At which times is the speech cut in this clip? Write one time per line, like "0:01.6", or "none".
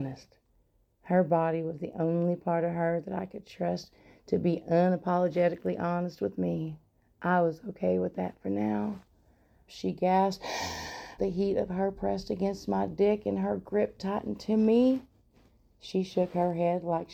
0:09.7
0:11.2

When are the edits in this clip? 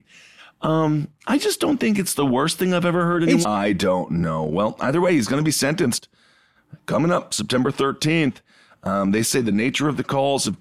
0:03.4

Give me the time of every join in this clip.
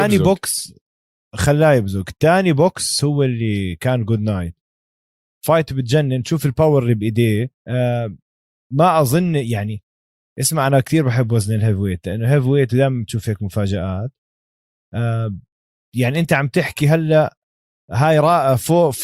0:07.6

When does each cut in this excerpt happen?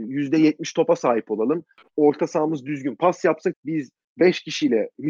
0:03.5

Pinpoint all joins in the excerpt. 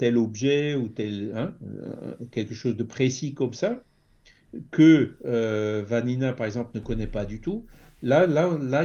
none

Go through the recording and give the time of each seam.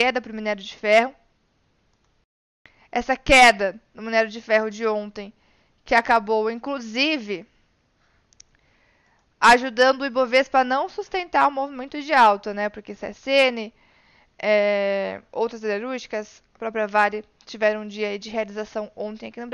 none

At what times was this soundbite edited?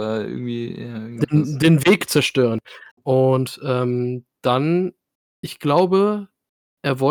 0:02.9

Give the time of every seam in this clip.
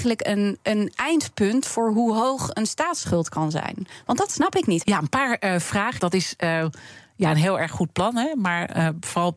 0:04.8
0:06.0

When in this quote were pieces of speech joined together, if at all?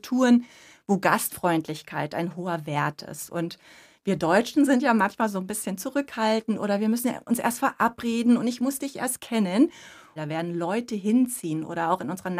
0:10.2

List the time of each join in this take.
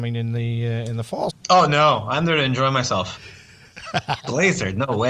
0:01.3
0:04.2

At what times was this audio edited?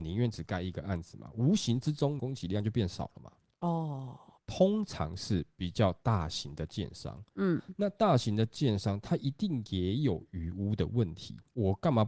0:02.2
0:04.4

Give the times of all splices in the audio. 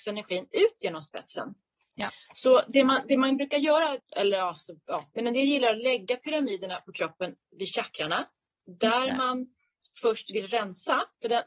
0:04.0
0:05.1

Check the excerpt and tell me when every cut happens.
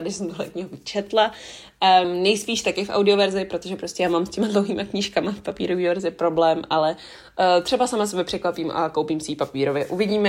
0:02.0

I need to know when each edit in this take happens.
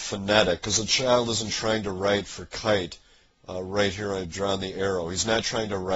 none

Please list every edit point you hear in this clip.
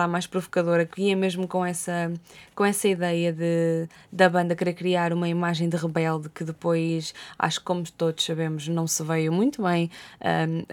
none

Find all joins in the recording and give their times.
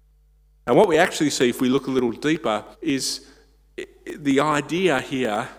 0:02.7

